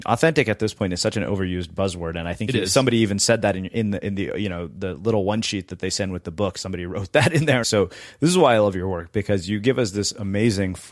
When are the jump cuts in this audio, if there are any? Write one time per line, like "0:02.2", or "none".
0:07.6